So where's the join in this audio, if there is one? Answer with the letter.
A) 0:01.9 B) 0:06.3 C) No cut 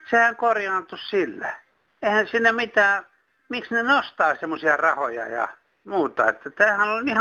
C